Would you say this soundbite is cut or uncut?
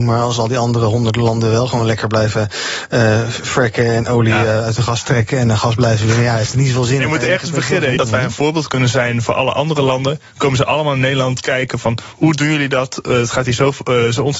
cut